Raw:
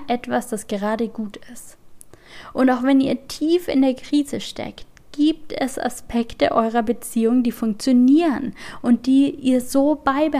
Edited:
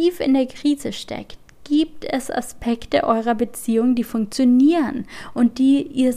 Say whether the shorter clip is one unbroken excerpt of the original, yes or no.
yes